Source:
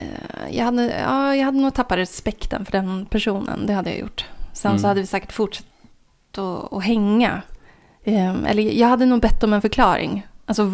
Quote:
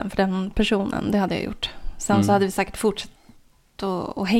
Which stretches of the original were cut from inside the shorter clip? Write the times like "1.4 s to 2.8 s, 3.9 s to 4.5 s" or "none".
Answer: none